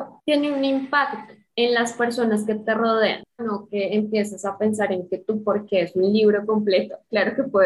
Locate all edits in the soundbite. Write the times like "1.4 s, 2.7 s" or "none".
3.4 s